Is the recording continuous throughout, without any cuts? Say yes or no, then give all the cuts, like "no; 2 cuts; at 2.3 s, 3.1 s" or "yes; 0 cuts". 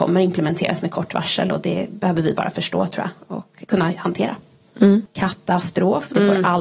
no; 2 cuts; at 3.6 s, 5.1 s